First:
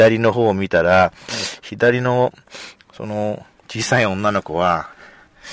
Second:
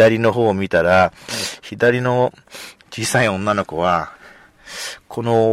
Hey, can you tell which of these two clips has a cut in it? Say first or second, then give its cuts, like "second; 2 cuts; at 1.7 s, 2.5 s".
second; 1 cut; at 2.8 s